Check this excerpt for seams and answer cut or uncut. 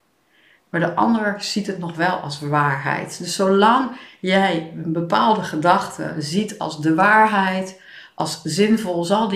uncut